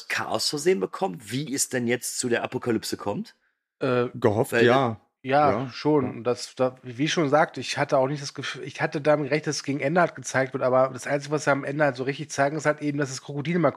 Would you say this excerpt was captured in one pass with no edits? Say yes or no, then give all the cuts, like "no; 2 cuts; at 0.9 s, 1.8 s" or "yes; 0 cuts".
yes; 0 cuts